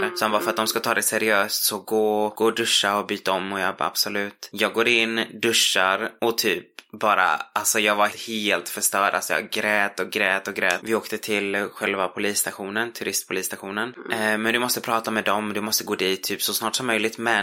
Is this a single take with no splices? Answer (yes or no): no